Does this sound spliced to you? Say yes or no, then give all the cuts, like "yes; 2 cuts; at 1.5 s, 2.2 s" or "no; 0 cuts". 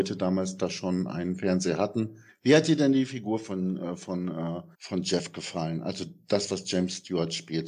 yes; 1 cut; at 4.7 s